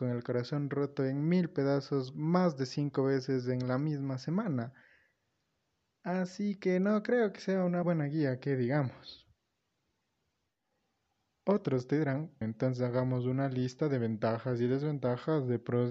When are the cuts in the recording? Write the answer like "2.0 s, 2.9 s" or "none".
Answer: 7.8 s, 12.4 s